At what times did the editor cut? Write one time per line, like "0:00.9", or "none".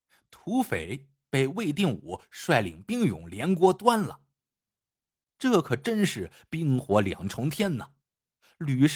0:05.3